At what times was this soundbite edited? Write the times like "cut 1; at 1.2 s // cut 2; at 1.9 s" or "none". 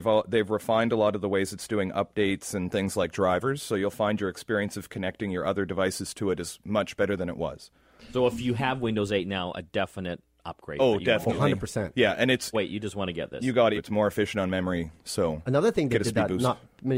cut 1; at 12.5 s // cut 2; at 13.7 s